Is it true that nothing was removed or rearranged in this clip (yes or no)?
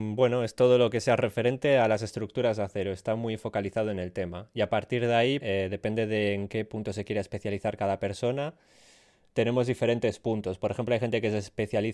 no